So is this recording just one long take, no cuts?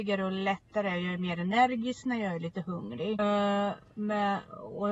no; 1 cut; at 3.2 s

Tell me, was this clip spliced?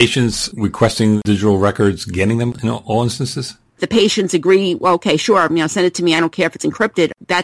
yes; 1 cut; at 3.7 s

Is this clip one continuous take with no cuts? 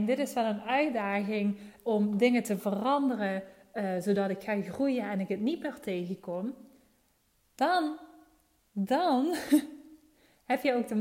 yes; 0 cuts

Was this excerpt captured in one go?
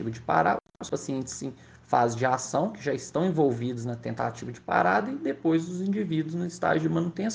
yes; 0 cuts

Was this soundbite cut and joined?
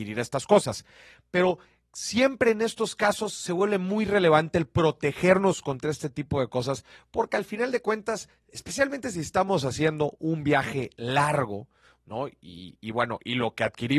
no; 0 cuts

